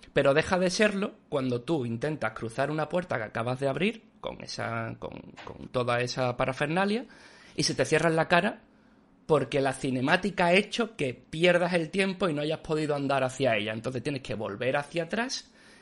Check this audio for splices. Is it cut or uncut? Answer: uncut